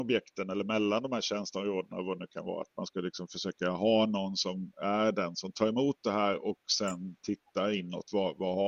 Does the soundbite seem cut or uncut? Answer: uncut